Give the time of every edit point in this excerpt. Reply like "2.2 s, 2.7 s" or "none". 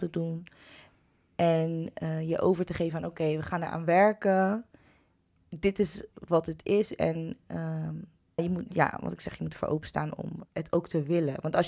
8.4 s, 10.4 s